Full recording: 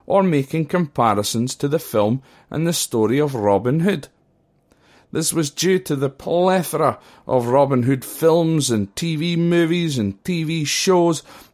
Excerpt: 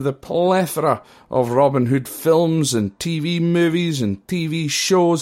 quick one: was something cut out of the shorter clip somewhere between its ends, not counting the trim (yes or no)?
no